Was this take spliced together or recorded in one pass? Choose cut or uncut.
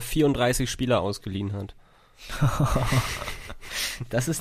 uncut